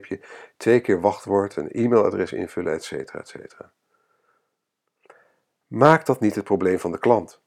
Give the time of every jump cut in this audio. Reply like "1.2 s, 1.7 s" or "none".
none